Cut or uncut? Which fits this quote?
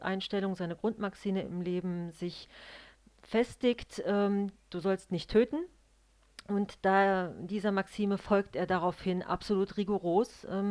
uncut